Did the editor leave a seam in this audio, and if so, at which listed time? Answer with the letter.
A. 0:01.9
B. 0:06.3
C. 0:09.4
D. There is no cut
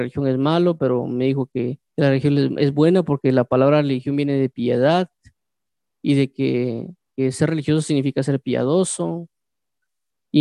A